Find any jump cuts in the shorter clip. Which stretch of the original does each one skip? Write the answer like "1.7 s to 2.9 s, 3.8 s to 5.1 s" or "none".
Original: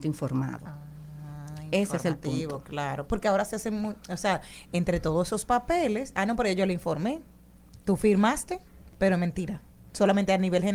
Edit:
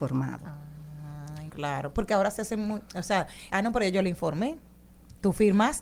1.7 s to 2.6 s, 4.6 s to 6.1 s